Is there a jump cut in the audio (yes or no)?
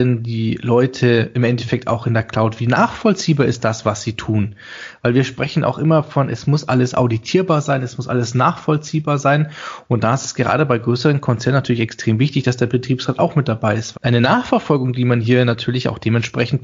yes